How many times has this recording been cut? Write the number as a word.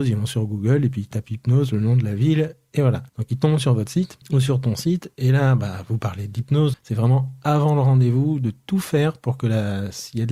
two